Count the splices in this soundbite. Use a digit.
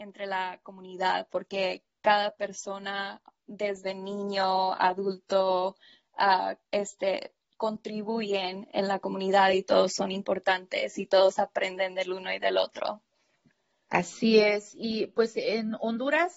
1